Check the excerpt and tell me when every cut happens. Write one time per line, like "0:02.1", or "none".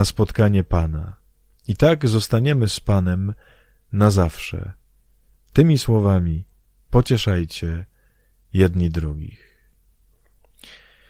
none